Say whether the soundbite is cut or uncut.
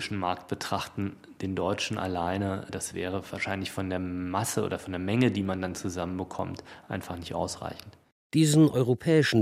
uncut